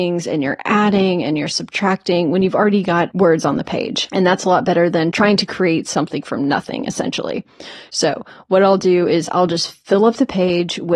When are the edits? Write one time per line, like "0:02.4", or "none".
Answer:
none